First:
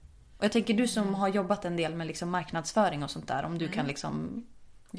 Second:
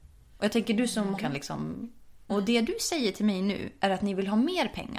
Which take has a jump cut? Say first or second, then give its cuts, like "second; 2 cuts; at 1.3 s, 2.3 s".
second; 2 cuts; at 1.2 s, 2.3 s